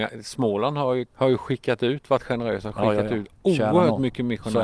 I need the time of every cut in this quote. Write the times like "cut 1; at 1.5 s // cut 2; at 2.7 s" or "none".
cut 1; at 1.1 s

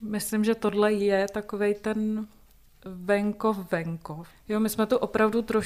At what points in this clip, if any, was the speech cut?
cut 1; at 4.3 s

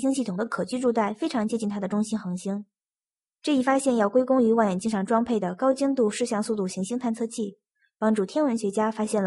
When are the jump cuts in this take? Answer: none

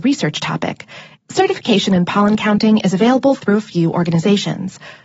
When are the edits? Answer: cut 1; at 1.1 s

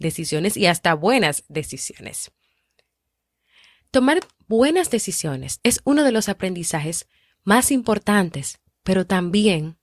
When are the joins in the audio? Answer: cut 1; at 5.6 s

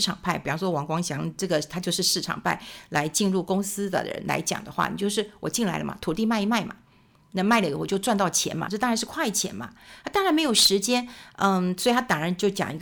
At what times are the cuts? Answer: none

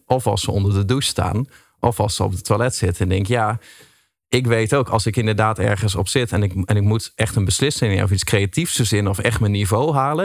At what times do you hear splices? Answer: none

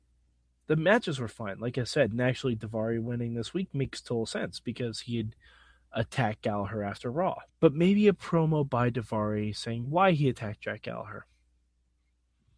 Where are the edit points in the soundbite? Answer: cut 1; at 7.5 s

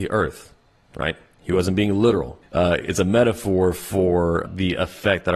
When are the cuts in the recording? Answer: cut 1; at 2.4 s // cut 2; at 4.5 s

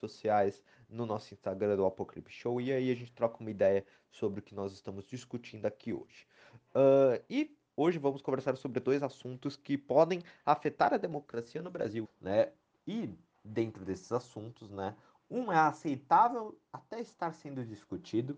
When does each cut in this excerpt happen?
cut 1; at 12.0 s

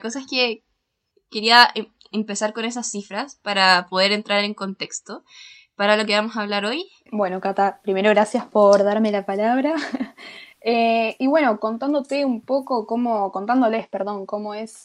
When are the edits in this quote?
cut 1; at 7.1 s

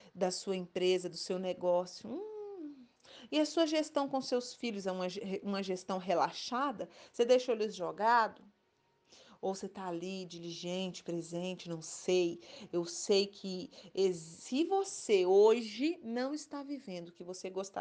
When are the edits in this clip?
none

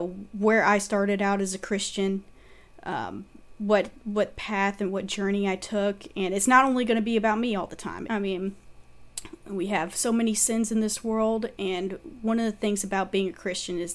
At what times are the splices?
cut 1; at 8.1 s

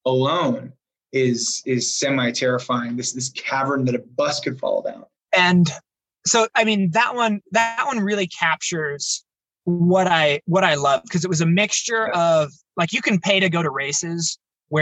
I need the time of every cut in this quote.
cut 1; at 5.3 s

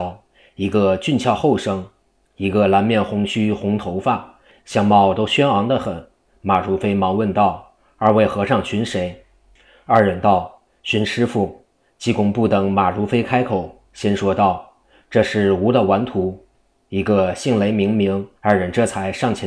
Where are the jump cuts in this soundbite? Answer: cut 1; at 18.4 s

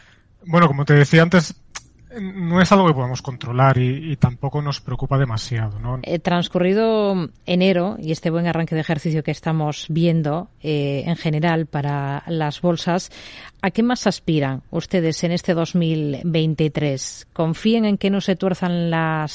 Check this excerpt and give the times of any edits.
cut 1; at 6.0 s

